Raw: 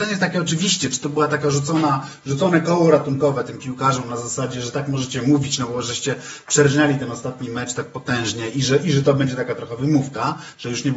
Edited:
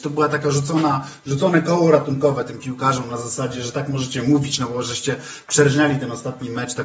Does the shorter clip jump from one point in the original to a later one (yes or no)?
no